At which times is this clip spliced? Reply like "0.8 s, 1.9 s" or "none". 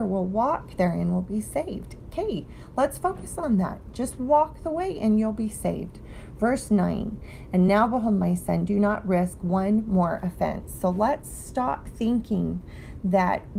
none